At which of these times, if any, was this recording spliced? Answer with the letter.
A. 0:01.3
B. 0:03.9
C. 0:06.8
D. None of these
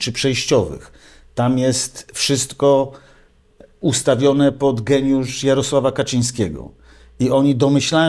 D